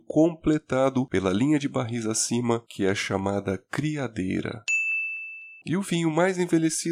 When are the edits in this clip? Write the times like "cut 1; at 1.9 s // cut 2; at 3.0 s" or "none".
cut 1; at 5.6 s